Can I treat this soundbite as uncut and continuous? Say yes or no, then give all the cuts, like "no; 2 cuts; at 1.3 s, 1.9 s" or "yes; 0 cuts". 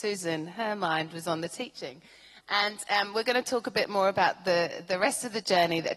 yes; 0 cuts